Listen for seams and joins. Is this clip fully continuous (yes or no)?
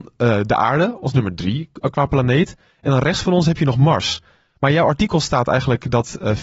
yes